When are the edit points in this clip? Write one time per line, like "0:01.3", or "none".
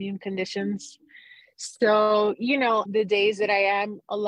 0:02.9